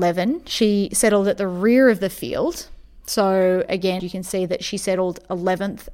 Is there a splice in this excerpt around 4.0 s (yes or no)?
yes